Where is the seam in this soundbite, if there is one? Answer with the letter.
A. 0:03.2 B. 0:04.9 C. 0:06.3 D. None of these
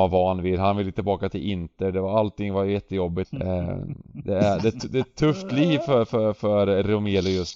A